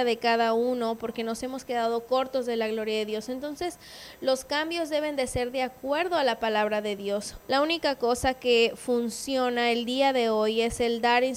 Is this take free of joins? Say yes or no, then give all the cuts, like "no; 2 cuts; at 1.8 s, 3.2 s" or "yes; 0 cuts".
no; 1 cut; at 7.4 s